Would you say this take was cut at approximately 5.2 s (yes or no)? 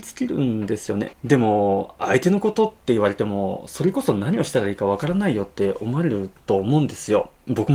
no